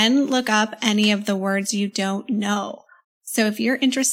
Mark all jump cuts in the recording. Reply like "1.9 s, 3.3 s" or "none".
3.0 s